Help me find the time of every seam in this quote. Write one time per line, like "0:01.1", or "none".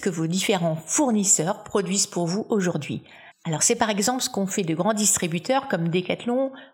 0:03.3